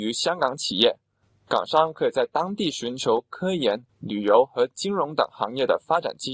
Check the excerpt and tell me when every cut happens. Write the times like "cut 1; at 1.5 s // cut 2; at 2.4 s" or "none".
none